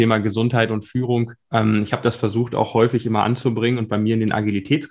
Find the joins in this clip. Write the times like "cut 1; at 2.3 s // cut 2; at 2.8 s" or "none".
cut 1; at 1.4 s